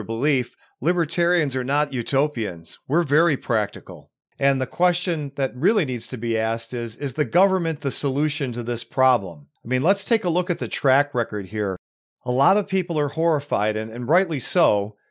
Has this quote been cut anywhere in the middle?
no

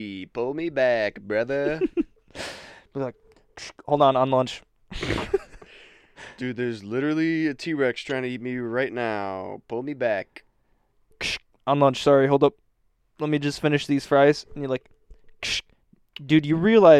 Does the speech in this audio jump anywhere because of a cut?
no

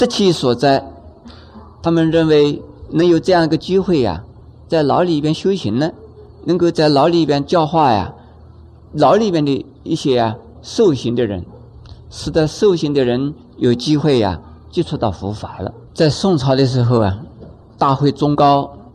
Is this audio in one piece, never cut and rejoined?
no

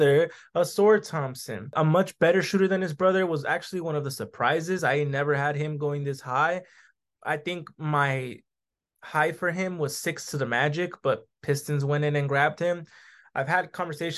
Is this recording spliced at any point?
no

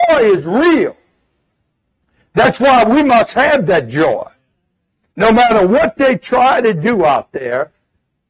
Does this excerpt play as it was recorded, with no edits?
no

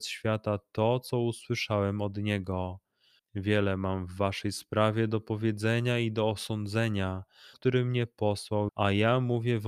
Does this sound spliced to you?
yes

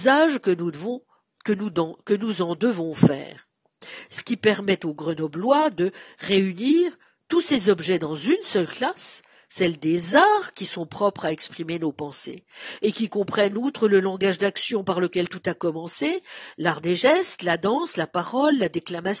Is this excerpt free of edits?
yes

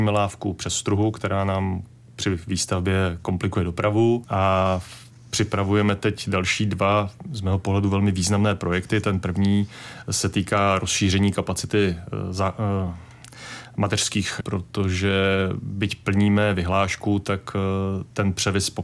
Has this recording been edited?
yes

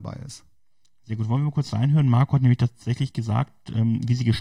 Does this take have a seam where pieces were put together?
no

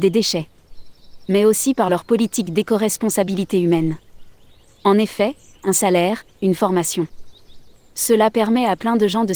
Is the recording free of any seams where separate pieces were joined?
no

